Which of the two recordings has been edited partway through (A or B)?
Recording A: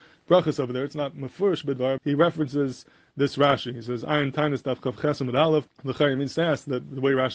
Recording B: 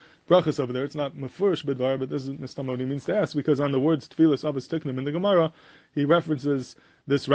A